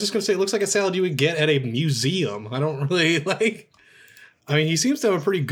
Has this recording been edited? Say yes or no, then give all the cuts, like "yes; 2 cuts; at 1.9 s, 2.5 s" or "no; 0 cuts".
yes; 1 cut; at 4.4 s